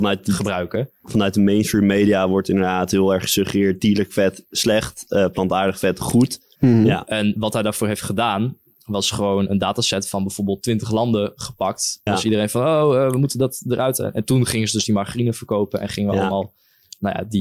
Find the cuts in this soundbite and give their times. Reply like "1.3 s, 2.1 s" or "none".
6.6 s, 12.1 s

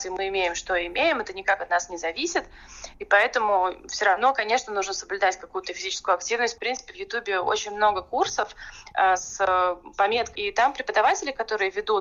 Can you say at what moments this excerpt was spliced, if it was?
6.6 s, 10.4 s

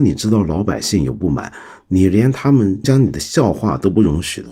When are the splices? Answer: 2.8 s

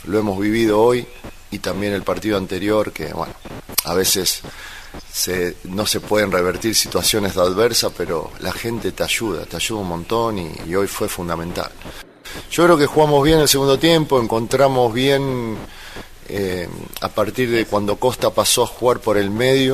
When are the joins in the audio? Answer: none

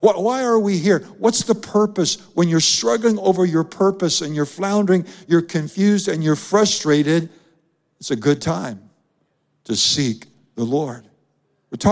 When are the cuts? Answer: none

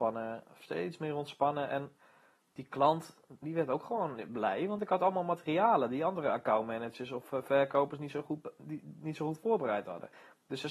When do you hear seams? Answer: 3.4 s

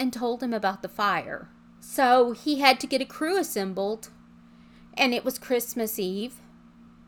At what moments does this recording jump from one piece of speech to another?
1.8 s

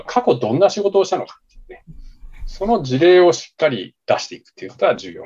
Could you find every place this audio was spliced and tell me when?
none

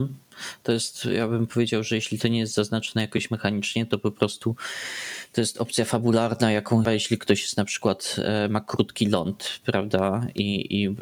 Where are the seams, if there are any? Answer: 6.8 s

